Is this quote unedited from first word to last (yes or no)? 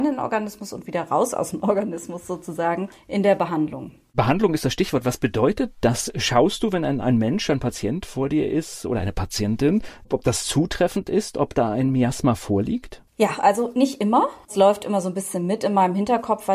yes